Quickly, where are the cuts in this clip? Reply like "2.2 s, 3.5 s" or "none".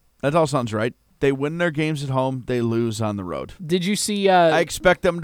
1.2 s, 3.6 s